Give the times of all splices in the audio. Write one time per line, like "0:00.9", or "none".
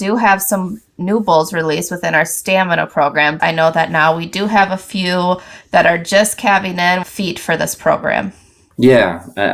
0:03.4
0:07.0